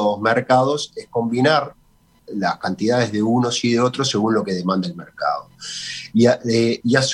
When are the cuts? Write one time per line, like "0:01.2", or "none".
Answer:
0:06.1